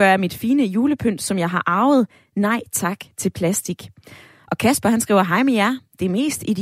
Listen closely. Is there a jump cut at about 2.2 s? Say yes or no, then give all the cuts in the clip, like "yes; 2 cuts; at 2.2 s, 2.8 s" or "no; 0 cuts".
no; 0 cuts